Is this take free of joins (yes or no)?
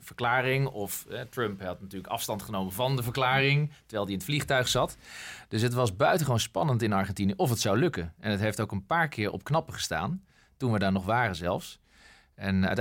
yes